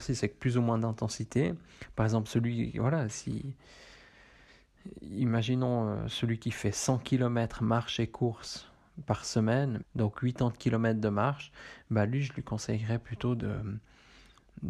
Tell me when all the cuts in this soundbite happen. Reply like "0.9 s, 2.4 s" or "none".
9.8 s